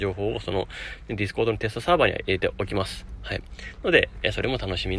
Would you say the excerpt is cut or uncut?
uncut